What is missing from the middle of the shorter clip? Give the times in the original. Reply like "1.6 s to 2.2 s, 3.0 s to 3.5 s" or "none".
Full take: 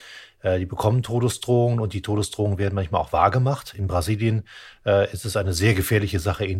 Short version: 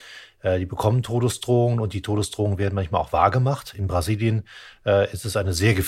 none